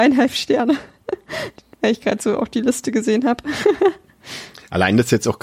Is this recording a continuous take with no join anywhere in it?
yes; 0 cuts

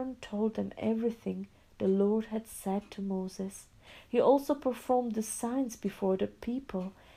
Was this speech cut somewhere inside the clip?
no; 0 cuts

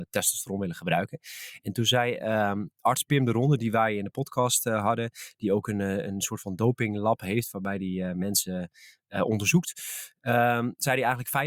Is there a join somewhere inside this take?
no; 0 cuts

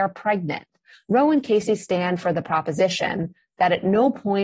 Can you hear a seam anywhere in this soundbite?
yes; 1 cut; at 0.9 s

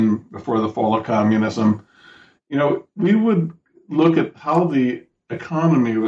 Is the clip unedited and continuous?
yes; 0 cuts

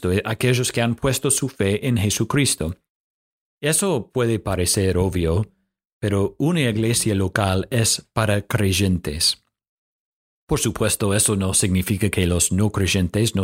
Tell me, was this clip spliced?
no; 0 cuts

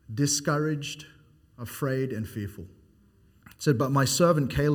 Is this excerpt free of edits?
no; 1 cut; at 3.4 s

